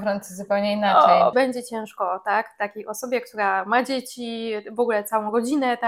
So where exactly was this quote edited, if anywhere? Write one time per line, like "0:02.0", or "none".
0:01.3

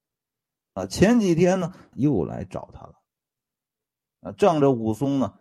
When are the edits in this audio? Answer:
0:01.9

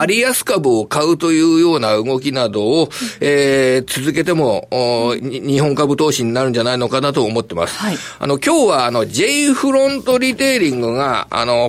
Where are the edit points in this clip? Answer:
0:05.2

